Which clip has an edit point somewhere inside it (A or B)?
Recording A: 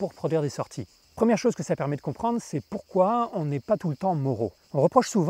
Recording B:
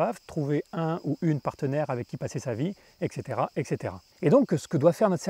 A